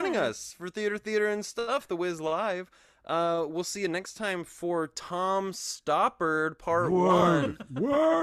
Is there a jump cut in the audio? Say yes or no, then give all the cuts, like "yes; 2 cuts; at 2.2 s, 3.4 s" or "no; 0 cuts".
no; 0 cuts